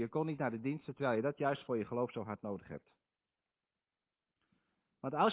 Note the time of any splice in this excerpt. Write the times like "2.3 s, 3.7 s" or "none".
none

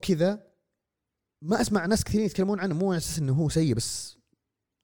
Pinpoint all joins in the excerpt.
none

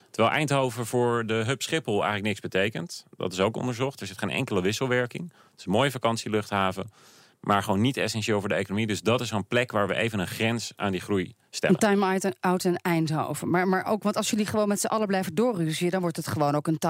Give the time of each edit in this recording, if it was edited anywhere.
none

